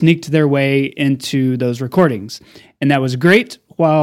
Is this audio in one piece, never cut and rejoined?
yes; 0 cuts

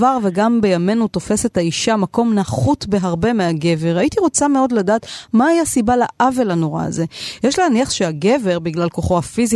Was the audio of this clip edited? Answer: no; 0 cuts

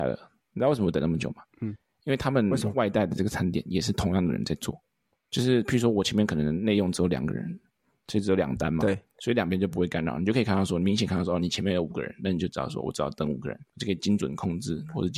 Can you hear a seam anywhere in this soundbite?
yes; 3 cuts; at 2.7 s, 9.1 s, 13.7 s

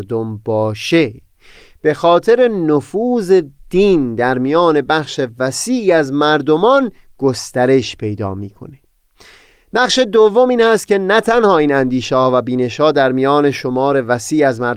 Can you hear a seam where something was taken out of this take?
no; 0 cuts

